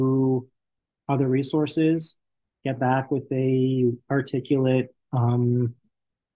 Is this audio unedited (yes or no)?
yes